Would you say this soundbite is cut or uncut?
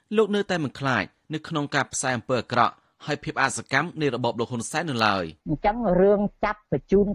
cut